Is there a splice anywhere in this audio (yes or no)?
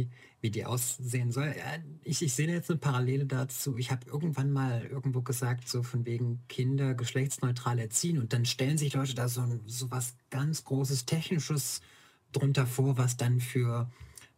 no